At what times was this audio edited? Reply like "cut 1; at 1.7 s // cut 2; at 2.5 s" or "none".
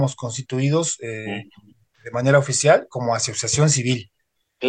none